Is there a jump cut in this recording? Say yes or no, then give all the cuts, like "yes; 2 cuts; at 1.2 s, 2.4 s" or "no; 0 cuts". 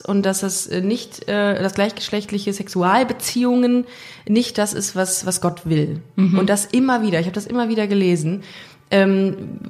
no; 0 cuts